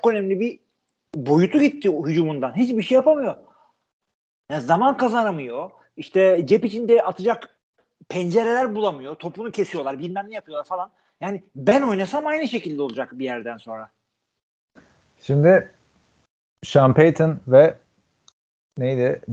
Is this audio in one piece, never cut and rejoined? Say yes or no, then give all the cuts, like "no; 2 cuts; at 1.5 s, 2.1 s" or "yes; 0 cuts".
yes; 0 cuts